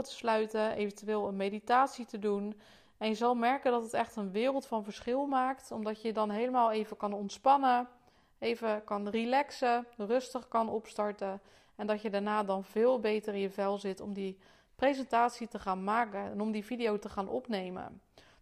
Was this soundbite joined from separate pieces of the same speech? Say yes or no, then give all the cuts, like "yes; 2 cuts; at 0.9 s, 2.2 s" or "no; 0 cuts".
no; 0 cuts